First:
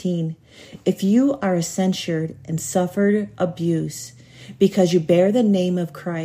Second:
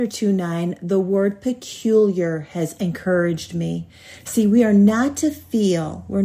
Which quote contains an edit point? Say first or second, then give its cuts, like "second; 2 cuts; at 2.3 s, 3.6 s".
second; 1 cut; at 2.8 s